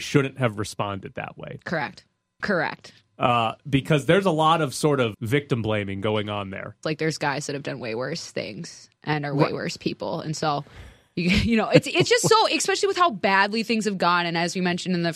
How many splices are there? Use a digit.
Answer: 3